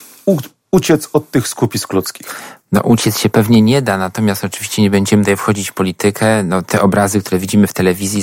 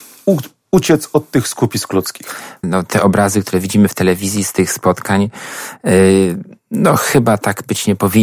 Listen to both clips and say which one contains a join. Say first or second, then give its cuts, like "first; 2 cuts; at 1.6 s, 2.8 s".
second; 1 cut; at 2.6 s